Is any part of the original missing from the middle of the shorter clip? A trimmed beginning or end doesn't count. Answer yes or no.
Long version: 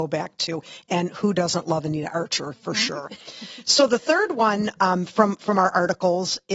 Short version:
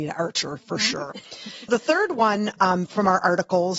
yes